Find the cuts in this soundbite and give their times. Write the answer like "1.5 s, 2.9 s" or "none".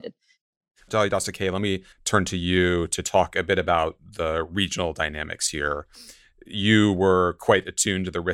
1.9 s

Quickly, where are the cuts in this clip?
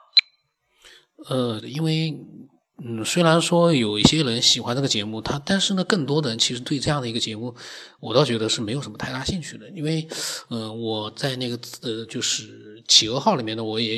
1.6 s

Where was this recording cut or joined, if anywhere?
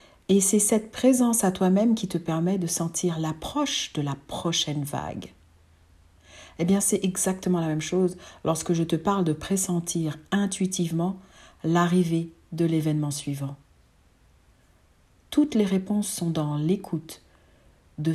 none

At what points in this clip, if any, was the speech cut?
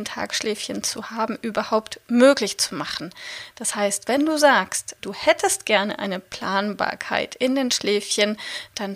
5.0 s

